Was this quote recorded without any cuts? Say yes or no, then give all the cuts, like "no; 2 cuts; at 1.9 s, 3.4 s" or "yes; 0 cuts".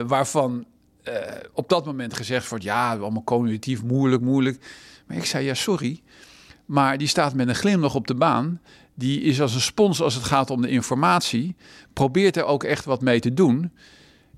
no; 1 cut; at 4.2 s